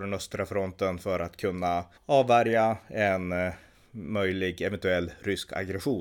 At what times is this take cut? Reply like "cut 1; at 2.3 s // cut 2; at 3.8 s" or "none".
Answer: cut 1; at 1.9 s

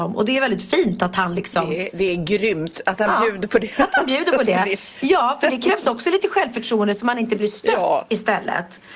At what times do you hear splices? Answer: none

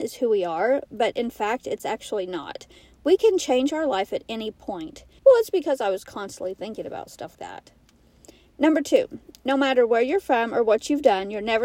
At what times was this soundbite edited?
cut 1; at 5.2 s // cut 2; at 7.3 s

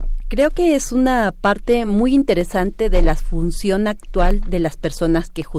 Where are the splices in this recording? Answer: none

